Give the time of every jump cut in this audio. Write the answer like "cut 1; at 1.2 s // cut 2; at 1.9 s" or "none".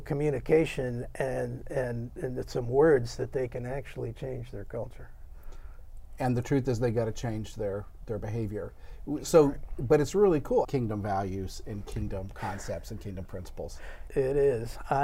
cut 1; at 10.6 s // cut 2; at 14.1 s